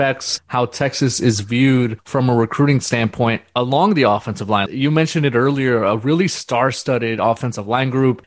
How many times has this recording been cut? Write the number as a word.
one